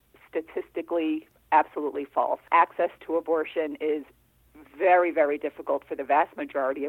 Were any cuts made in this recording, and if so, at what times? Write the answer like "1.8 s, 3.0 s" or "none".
2.5 s

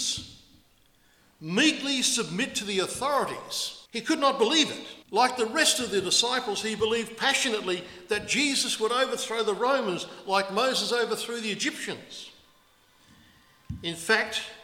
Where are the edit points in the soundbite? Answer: 3.9 s, 5.0 s

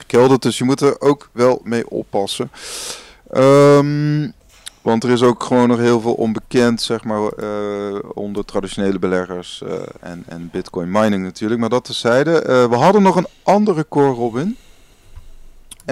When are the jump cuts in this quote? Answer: none

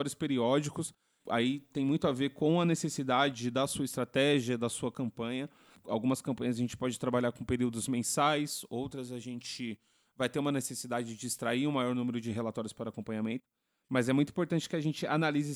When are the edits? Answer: none

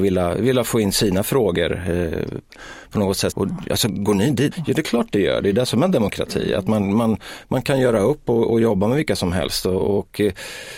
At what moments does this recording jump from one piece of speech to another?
3.3 s, 4.5 s

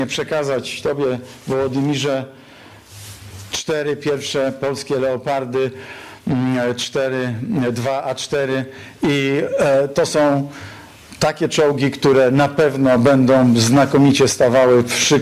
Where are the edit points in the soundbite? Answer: none

